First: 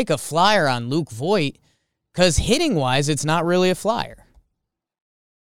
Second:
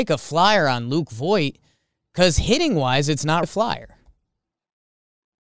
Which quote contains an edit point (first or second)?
second